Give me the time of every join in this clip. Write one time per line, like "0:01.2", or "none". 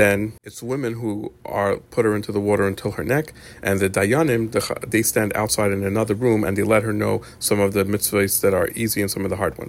none